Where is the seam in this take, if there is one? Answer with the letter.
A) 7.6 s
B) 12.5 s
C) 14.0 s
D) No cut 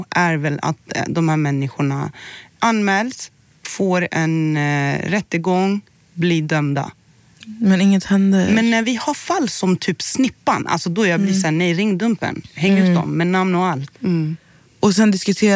C